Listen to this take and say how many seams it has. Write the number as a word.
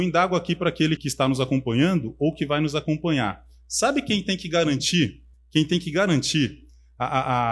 one